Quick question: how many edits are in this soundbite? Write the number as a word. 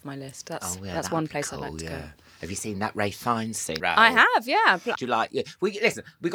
two